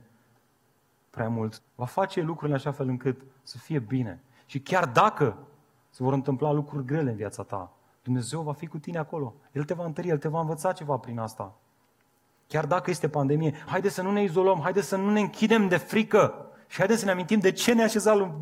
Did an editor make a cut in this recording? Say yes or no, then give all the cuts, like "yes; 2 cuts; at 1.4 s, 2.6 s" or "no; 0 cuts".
yes; 2 cuts; at 1.6 s, 13.7 s